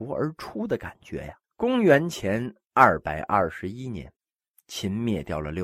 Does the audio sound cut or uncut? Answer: cut